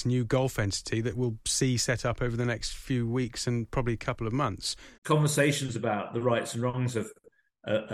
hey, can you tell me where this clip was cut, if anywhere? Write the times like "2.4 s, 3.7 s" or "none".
5.0 s